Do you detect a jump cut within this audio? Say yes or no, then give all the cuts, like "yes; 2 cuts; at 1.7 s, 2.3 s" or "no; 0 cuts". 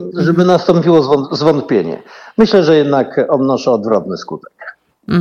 no; 0 cuts